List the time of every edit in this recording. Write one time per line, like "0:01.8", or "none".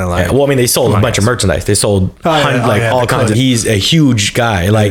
0:03.3

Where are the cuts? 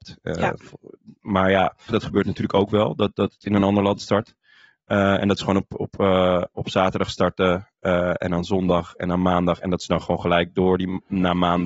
0:01.9

